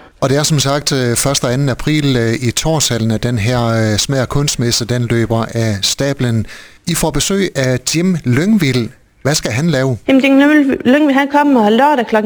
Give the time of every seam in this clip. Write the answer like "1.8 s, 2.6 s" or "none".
none